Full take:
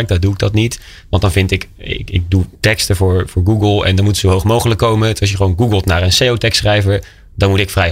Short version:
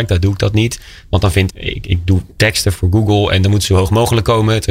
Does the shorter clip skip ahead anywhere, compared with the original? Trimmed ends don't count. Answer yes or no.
yes